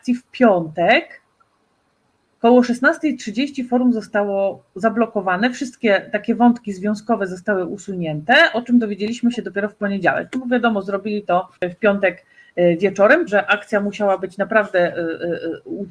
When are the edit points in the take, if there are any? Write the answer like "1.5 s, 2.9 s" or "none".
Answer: 11.6 s, 13.3 s